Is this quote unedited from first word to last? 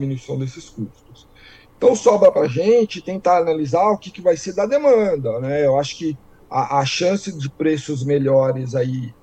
yes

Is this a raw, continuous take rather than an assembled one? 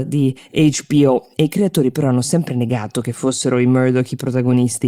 yes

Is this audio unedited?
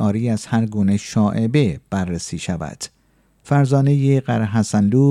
yes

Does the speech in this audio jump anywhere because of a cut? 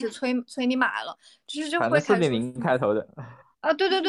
no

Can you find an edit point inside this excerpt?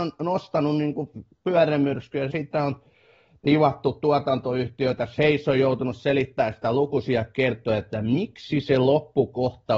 yes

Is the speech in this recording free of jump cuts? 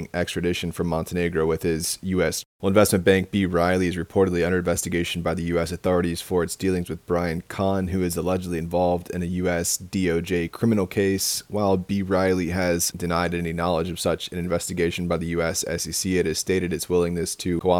no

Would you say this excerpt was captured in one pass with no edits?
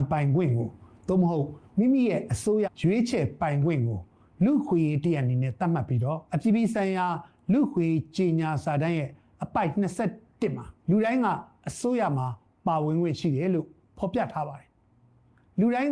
no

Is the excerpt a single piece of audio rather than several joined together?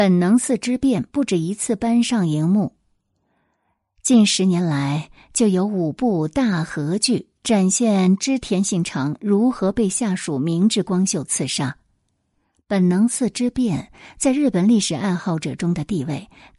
yes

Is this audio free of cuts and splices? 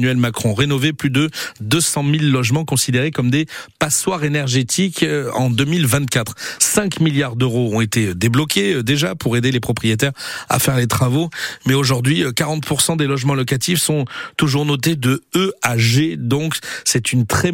yes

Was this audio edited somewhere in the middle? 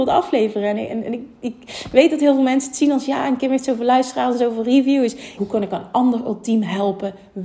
yes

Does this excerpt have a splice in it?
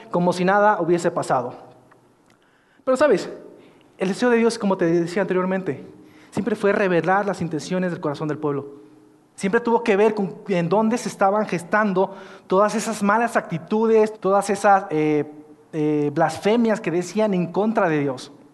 yes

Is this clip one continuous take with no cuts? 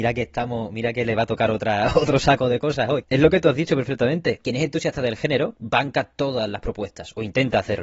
yes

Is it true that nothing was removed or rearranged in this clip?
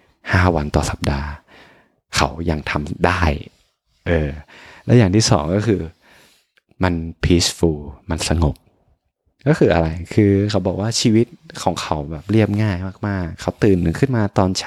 yes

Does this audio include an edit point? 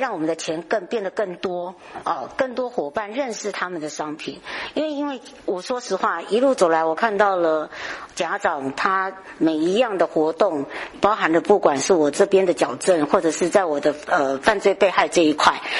yes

